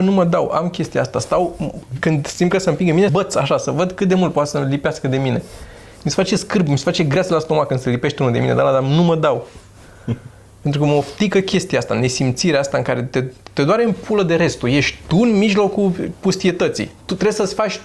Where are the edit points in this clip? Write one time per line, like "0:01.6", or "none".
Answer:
0:03.1